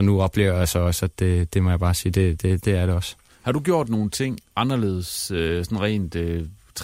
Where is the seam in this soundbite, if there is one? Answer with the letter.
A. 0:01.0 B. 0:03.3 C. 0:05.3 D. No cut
D